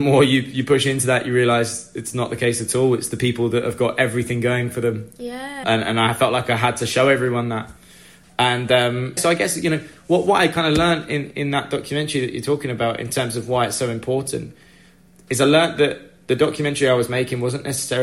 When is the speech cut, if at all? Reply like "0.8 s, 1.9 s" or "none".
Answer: 5.6 s, 9.2 s